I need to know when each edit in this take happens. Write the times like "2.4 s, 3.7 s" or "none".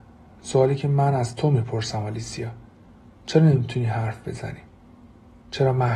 none